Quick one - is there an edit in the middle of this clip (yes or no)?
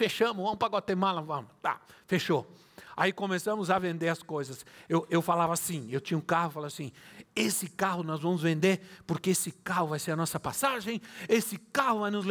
no